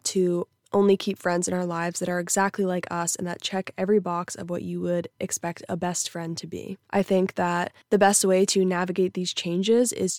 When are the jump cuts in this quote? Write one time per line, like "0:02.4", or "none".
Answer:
none